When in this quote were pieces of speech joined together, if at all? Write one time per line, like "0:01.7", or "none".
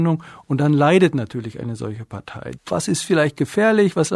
0:02.6